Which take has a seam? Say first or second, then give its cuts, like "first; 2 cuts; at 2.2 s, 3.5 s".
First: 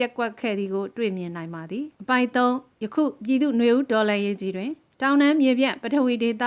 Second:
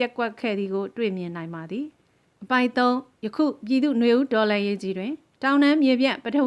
first; 1 cut; at 1.9 s